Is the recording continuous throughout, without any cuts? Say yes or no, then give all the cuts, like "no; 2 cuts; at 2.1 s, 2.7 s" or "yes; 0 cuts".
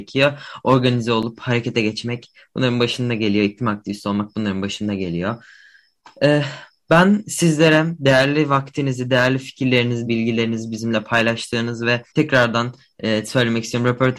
no; 2 cuts; at 10.0 s, 12.1 s